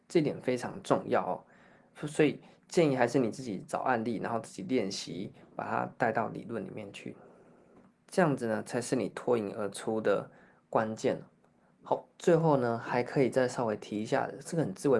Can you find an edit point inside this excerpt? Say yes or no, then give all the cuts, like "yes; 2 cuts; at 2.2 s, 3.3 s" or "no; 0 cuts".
no; 0 cuts